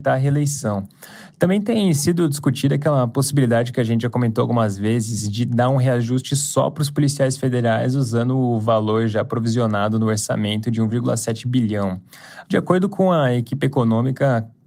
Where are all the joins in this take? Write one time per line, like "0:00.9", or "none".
0:01.3
0:12.4